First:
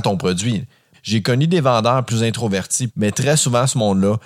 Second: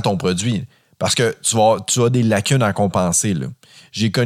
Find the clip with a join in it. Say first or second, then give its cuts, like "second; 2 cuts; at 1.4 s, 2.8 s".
first; 2 cuts; at 0.9 s, 2.9 s